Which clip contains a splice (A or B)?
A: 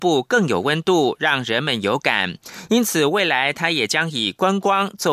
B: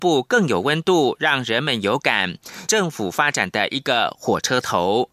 B